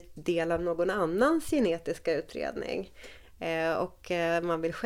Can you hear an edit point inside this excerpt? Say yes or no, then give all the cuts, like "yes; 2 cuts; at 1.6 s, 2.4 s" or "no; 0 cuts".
no; 0 cuts